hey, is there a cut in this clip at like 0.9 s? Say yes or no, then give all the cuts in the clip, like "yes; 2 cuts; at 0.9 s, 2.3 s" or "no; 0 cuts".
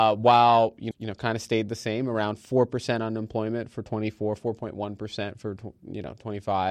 yes; 1 cut; at 0.9 s